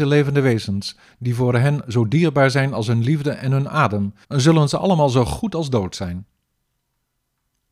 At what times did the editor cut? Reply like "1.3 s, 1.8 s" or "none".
4.2 s